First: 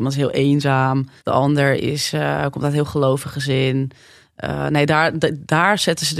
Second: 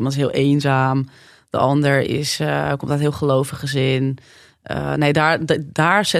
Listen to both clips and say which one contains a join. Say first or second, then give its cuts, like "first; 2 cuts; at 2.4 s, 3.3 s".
first; 1 cut; at 1.2 s